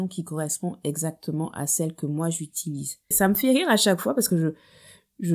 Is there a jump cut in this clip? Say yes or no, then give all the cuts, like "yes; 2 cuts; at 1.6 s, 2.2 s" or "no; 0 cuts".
yes; 1 cut; at 3.1 s